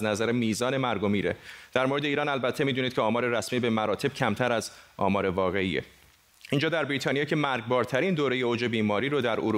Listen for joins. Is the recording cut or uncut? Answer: uncut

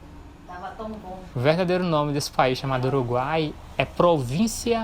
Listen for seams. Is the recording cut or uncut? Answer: cut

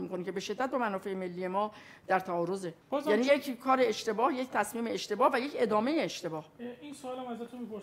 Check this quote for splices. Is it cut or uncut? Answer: cut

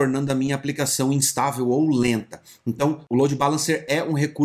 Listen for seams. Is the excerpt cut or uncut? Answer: uncut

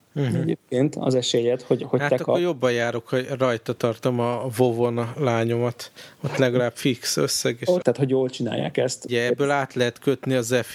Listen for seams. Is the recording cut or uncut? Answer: cut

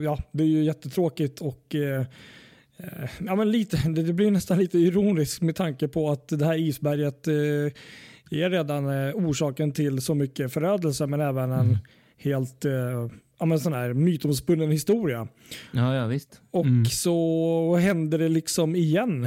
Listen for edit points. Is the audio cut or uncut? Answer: uncut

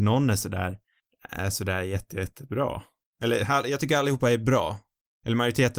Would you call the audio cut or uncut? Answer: uncut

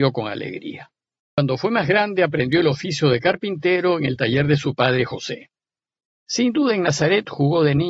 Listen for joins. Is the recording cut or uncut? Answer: cut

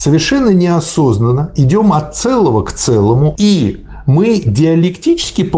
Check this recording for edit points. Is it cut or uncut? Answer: cut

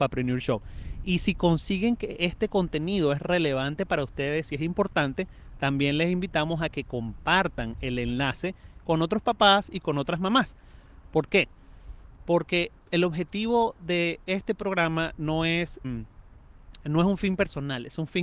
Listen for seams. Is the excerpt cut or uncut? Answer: cut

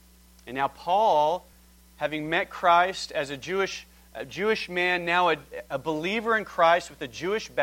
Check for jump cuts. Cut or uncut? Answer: uncut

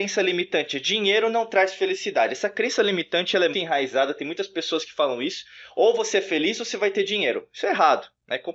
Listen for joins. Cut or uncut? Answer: cut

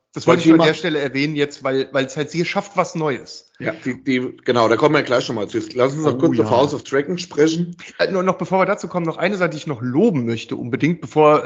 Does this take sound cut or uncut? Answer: uncut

